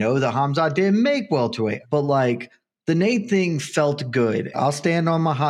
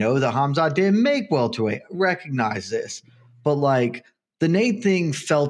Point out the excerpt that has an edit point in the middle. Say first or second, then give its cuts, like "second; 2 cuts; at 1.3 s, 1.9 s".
first; 2 cuts; at 1.8 s, 4.5 s